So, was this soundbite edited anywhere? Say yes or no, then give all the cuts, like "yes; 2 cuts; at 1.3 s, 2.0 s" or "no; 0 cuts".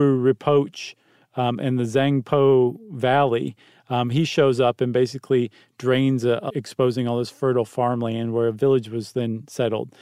yes; 1 cut; at 6.5 s